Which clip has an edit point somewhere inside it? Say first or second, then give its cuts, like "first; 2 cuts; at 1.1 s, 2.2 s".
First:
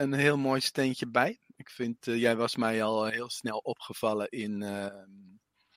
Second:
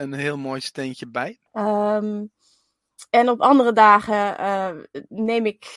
second; 1 cut; at 1.5 s